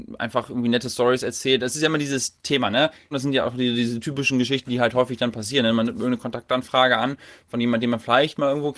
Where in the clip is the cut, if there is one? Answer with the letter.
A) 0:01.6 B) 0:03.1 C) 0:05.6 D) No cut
B